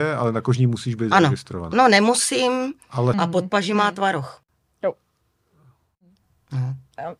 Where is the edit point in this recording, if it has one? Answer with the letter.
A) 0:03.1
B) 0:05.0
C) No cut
A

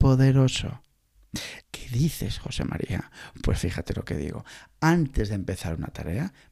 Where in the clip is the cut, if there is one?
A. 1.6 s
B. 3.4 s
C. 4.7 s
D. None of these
A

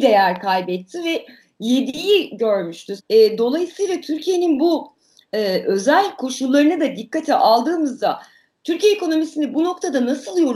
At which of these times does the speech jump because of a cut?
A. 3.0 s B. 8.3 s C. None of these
A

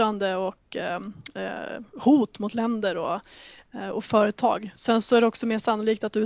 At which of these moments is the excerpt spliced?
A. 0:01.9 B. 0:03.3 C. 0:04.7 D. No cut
D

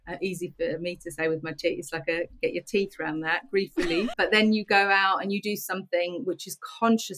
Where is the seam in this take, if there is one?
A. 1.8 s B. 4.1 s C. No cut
B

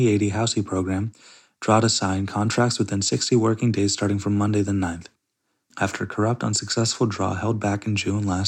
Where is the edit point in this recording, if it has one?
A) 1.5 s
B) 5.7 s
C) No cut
B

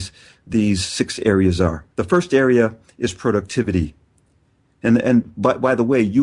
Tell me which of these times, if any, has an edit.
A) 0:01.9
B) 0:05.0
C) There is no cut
A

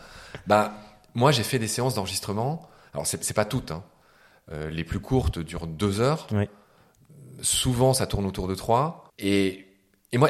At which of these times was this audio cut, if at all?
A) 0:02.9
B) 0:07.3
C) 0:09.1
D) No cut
C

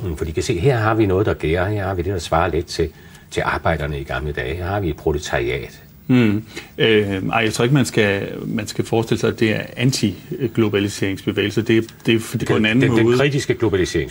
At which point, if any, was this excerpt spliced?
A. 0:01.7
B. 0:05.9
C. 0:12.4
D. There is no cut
C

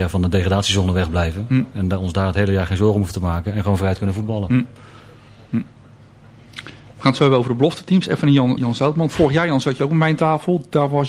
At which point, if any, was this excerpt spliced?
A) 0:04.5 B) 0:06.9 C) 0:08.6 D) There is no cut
C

